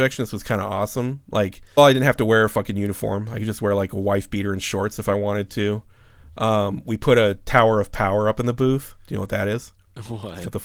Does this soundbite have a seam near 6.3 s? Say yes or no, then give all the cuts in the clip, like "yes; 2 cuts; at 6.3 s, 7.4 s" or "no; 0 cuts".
no; 1 cut; at 1.8 s